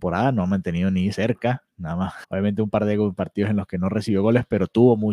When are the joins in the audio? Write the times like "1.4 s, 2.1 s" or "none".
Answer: 2.2 s